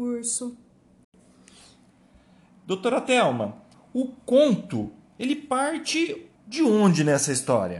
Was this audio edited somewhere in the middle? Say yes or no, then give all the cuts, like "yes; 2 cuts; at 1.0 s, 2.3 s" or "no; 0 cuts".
yes; 2 cuts; at 3.7 s, 6.4 s